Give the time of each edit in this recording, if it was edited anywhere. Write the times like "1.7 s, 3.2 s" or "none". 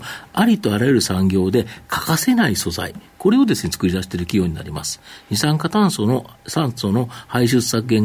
none